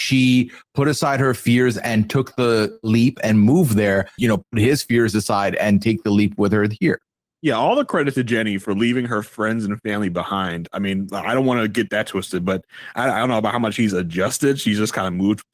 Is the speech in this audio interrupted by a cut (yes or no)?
yes